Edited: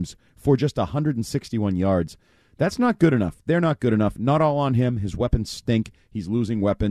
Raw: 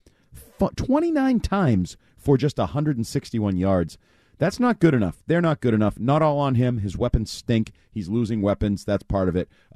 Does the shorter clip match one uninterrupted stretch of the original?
yes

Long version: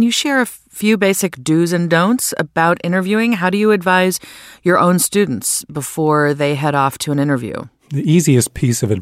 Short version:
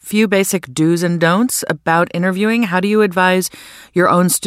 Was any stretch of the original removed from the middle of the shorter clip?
no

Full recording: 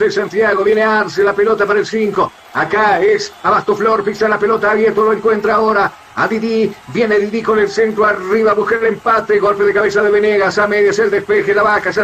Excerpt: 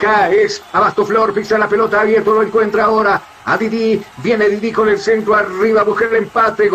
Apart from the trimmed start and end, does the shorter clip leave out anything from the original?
no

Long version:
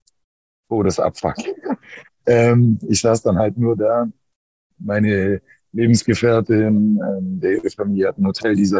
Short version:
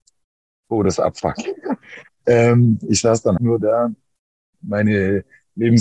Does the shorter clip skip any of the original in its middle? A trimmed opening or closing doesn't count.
yes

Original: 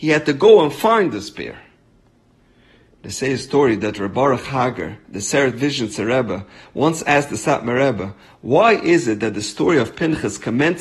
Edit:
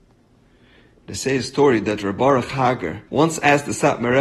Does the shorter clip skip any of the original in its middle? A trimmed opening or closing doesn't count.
yes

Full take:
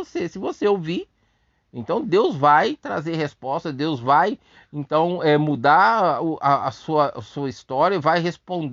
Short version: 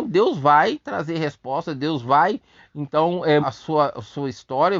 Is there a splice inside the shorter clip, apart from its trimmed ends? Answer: yes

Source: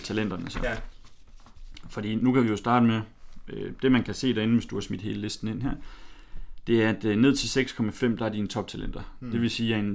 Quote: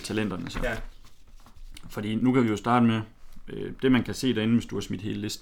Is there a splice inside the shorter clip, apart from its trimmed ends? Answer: no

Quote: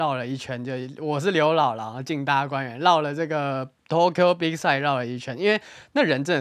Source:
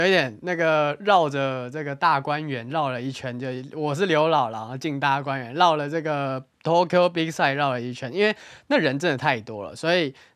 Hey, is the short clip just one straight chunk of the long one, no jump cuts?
yes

